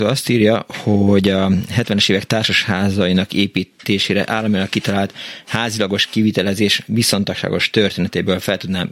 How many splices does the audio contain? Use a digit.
0